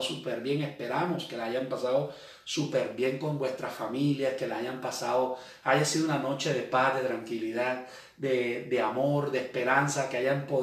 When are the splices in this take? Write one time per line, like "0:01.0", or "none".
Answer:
none